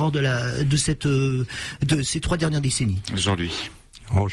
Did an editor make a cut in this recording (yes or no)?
no